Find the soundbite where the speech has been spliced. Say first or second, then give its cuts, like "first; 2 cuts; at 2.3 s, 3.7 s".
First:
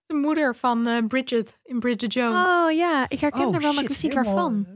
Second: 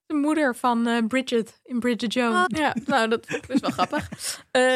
second; 1 cut; at 2.5 s